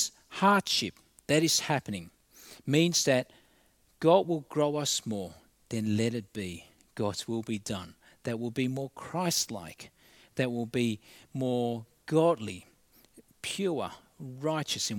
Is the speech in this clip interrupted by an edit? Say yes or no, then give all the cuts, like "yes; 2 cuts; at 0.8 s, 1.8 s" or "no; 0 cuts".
no; 0 cuts